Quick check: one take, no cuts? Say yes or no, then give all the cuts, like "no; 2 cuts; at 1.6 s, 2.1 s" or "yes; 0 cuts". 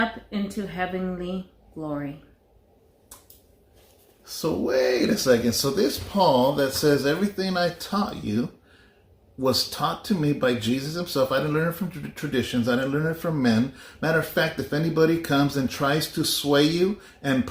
yes; 0 cuts